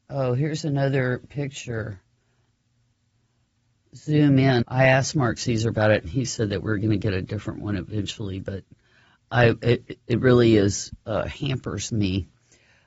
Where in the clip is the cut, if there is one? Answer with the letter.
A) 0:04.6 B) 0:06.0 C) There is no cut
A